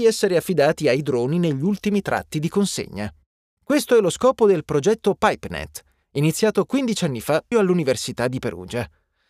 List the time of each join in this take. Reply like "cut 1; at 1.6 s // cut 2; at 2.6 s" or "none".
cut 1; at 3.6 s // cut 2; at 7.5 s